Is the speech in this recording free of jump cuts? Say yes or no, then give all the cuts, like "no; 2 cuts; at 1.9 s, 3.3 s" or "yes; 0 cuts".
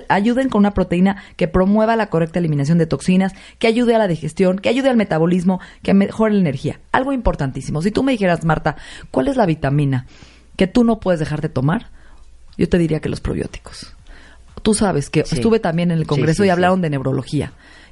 yes; 0 cuts